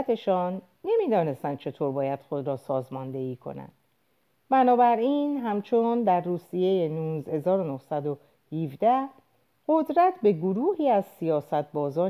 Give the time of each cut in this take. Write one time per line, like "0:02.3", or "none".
none